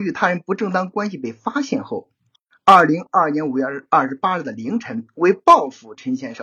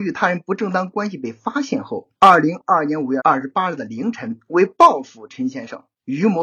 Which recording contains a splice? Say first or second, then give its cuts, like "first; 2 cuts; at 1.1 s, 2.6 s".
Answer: second; 2 cuts; at 2.1 s, 3.2 s